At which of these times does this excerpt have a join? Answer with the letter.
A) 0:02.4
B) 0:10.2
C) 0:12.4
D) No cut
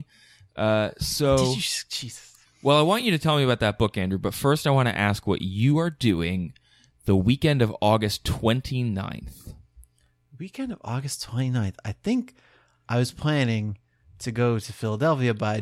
A